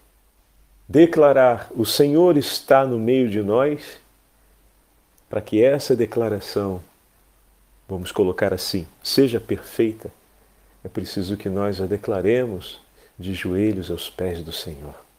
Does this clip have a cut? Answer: no; 0 cuts

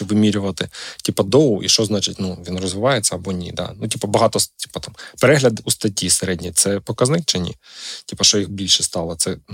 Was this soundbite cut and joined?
no; 0 cuts

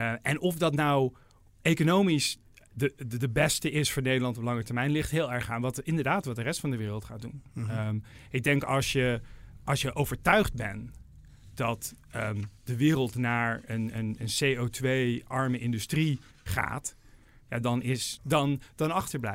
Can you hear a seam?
yes; 1 cut; at 18.2 s

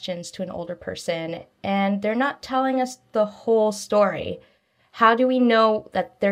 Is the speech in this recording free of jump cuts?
yes; 0 cuts

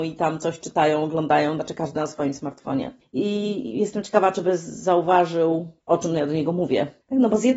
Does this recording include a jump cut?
yes; 1 cut; at 3.1 s

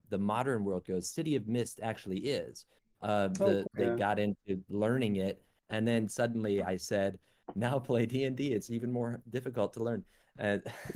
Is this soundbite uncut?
no; 1 cut; at 3.7 s

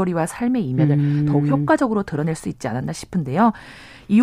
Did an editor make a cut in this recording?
no; 0 cuts

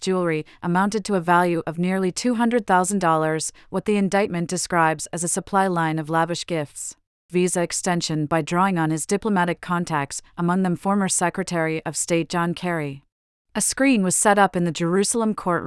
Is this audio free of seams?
no; 2 cuts; at 7.3 s, 13.4 s

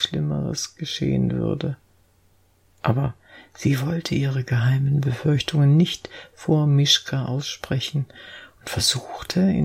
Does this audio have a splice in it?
no; 0 cuts

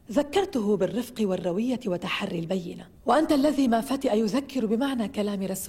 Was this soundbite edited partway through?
yes; 1 cut; at 3.0 s

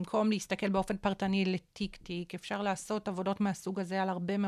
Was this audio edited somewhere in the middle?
no; 0 cuts

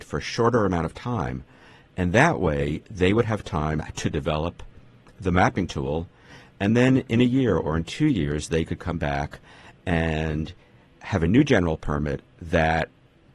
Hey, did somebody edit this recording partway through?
no; 0 cuts

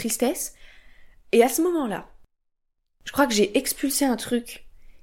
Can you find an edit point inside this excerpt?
no; 0 cuts

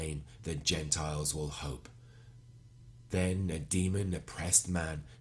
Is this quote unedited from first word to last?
yes; 0 cuts

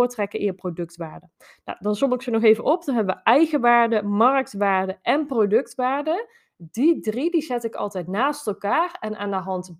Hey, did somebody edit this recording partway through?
no; 0 cuts

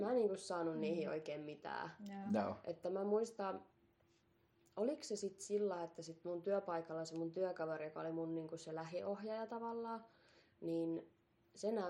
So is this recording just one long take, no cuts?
yes; 0 cuts

